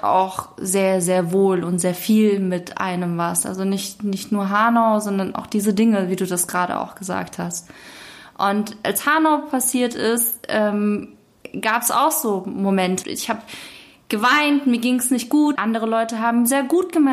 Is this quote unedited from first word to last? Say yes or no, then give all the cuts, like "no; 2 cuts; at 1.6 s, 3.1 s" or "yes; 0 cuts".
no; 2 cuts; at 13.0 s, 15.6 s